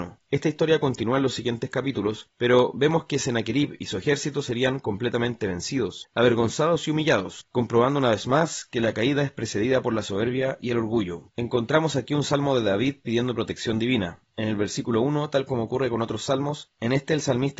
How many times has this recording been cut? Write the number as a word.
one